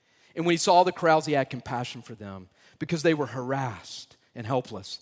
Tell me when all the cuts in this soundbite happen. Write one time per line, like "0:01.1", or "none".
none